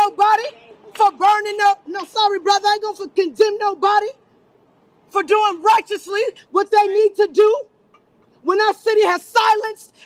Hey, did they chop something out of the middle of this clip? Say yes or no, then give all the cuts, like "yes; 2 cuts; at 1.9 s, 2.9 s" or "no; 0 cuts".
no; 0 cuts